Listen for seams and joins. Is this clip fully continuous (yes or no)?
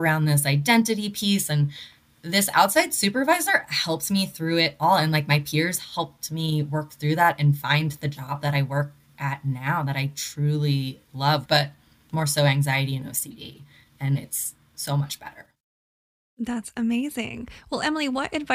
no